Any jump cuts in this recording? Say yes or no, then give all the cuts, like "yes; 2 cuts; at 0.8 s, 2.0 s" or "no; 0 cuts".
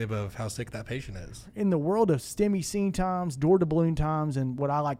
no; 0 cuts